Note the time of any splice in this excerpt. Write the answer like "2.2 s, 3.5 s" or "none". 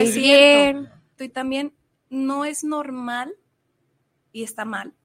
1.2 s